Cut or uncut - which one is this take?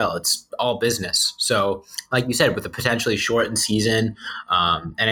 uncut